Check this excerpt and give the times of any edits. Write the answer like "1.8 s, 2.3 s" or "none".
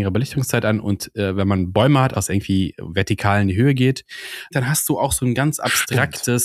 2.1 s, 4.5 s